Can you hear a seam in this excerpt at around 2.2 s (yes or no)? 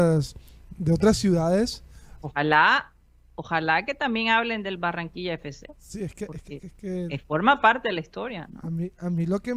yes